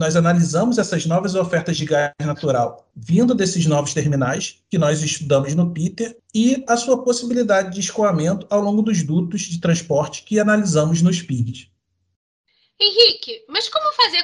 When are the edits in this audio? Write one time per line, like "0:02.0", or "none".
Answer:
none